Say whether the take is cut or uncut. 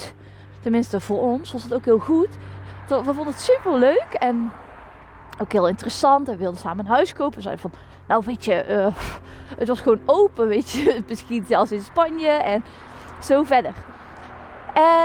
uncut